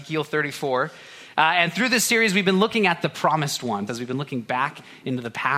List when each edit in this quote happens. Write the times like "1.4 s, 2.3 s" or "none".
3.9 s